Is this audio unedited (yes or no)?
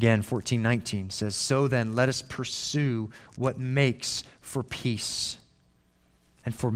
yes